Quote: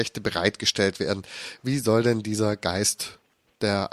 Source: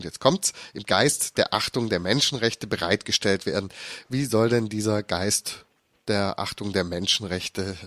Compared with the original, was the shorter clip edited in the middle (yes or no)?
no